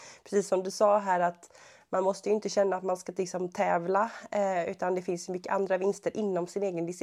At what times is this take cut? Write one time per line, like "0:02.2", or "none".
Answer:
none